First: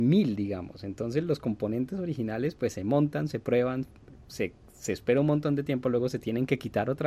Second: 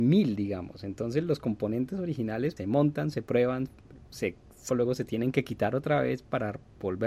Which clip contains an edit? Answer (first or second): second